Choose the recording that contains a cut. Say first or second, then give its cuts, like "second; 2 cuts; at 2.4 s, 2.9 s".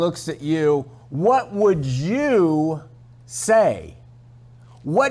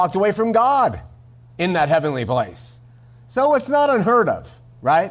first; 1 cut; at 1.0 s